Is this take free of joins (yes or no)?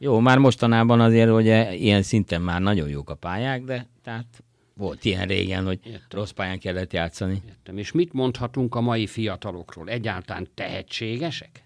yes